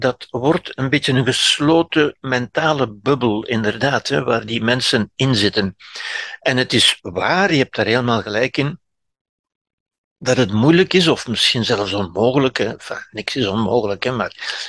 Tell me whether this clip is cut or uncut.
uncut